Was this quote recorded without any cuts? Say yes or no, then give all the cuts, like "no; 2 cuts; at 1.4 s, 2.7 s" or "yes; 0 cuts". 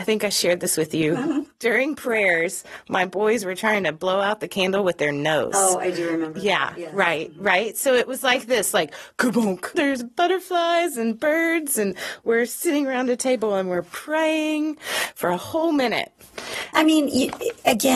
no; 2 cuts; at 9.7 s, 16.7 s